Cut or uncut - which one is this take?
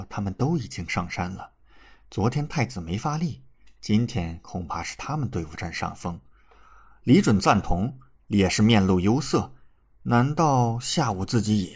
uncut